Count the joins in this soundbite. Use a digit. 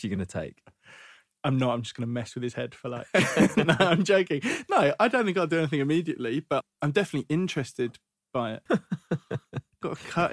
1